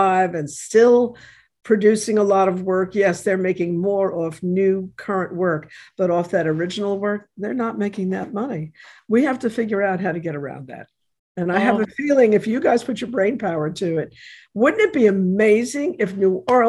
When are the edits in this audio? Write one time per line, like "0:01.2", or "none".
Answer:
none